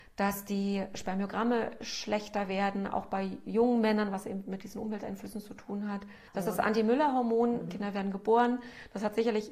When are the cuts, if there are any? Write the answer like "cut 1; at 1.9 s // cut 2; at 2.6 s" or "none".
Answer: cut 1; at 6.3 s // cut 2; at 7.7 s